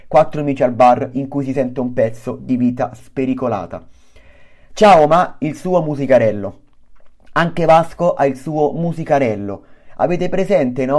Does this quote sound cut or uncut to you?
uncut